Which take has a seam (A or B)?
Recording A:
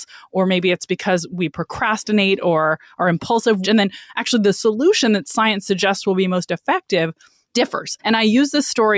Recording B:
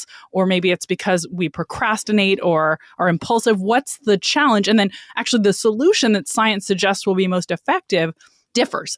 A